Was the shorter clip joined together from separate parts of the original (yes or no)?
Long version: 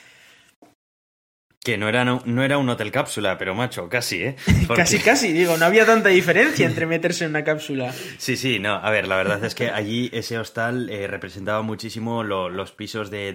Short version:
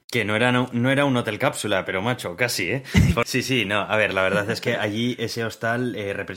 yes